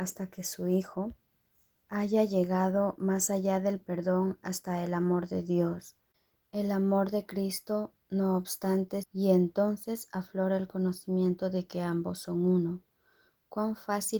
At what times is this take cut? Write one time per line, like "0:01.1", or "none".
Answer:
0:09.0